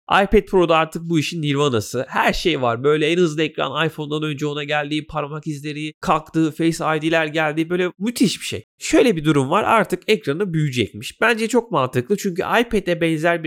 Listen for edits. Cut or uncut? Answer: cut